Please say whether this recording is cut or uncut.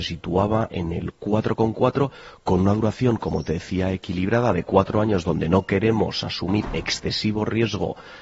uncut